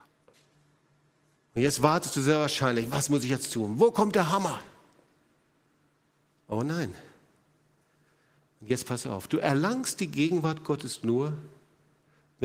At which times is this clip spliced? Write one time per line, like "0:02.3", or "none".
0:01.4